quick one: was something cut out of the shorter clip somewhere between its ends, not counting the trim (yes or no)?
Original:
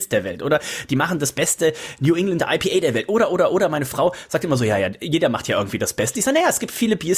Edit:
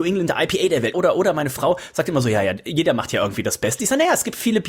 yes